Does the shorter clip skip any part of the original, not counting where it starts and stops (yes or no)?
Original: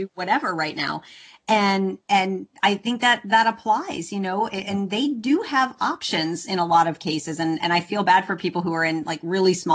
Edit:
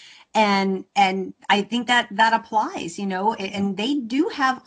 no